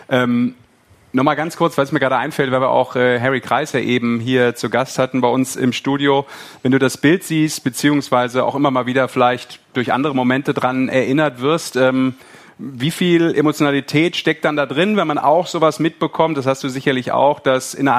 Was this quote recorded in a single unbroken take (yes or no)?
yes